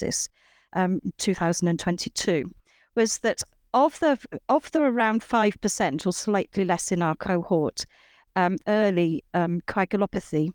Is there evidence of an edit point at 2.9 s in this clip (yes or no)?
no